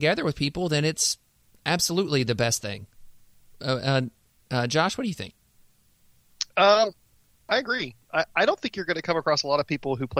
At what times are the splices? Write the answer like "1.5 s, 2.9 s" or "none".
none